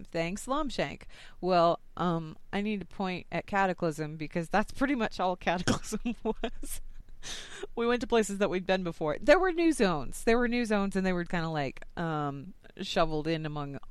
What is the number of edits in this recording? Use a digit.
1